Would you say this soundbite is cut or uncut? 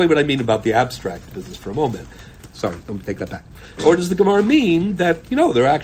cut